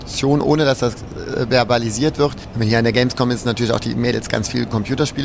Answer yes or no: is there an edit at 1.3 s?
no